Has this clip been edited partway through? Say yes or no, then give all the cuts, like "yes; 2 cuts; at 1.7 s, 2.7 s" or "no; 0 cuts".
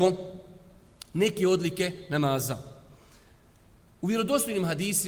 no; 0 cuts